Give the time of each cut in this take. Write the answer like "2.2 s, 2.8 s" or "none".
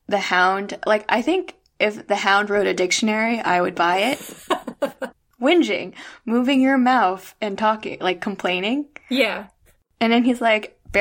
none